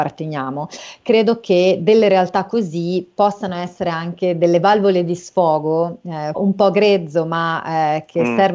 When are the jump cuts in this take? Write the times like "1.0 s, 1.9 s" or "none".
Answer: 6.3 s